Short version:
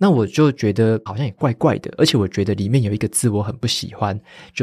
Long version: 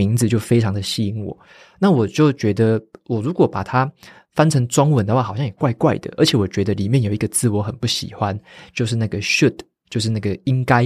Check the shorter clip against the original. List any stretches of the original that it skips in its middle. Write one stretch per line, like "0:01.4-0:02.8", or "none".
0:02.9-0:05.3